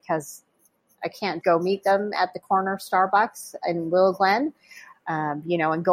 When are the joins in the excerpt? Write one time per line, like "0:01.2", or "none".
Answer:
0:01.4
0:04.9